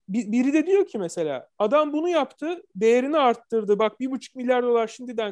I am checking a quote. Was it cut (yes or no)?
no